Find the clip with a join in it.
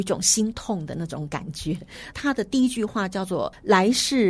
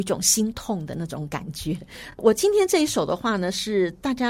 first; 1 cut; at 2.1 s

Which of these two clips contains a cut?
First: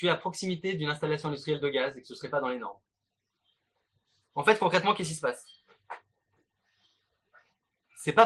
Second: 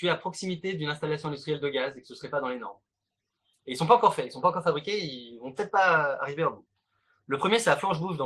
second; 1 cut; at 3.5 s

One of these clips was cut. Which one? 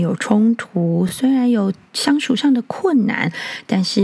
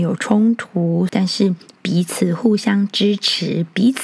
second; 1 cut; at 1.1 s

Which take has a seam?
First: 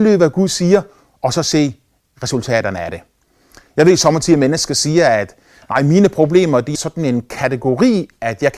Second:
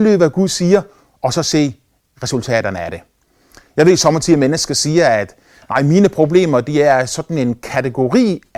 first; 1 cut; at 6.7 s

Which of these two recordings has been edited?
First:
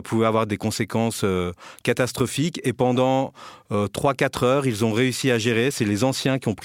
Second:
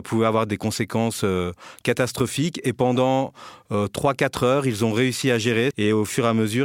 second; 1 cut; at 5.7 s

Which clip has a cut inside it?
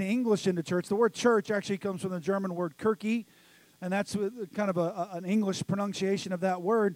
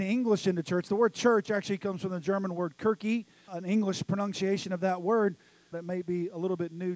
second; 2 cuts; at 3.5 s, 5.7 s

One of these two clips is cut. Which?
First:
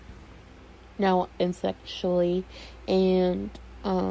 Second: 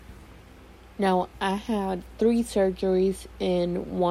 first; 1 cut; at 1.3 s

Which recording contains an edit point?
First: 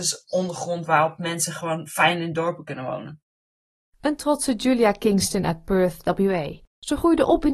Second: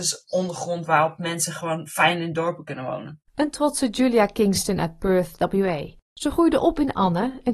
second; 1 cut; at 3.2 s

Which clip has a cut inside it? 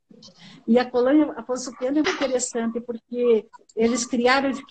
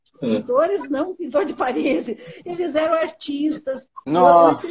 first; 1 cut; at 2.0 s

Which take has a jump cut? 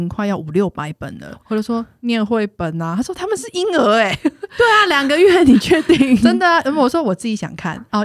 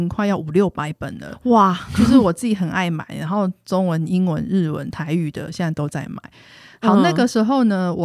first; 1 cut; at 1.4 s

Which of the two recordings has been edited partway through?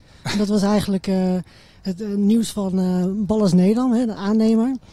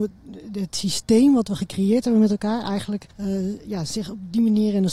second; 1 cut; at 3.1 s

